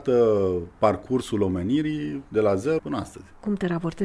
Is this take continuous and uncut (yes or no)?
no